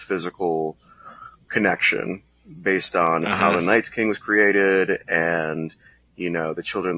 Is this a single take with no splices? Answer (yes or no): yes